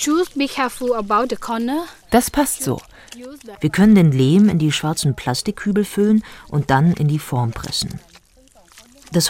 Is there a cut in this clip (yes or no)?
yes